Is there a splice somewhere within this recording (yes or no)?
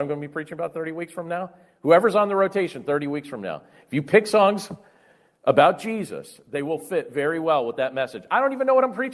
no